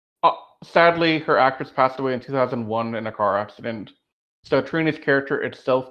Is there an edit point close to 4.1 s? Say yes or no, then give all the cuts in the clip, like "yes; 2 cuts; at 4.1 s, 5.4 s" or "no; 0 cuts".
no; 0 cuts